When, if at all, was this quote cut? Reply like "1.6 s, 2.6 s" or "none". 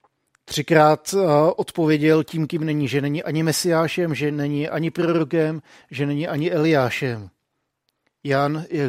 none